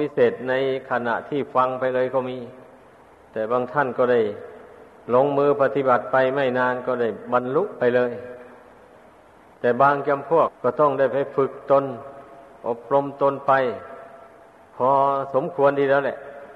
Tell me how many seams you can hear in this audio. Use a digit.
1